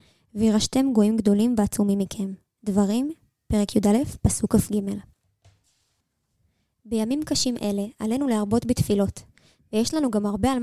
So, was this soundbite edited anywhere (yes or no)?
no